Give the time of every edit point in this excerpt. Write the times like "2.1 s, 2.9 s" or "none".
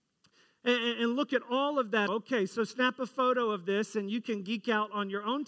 2.1 s